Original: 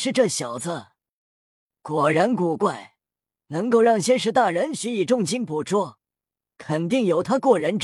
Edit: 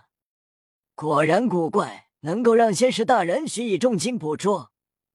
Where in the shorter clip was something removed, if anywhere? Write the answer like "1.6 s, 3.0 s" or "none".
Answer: 2.2 s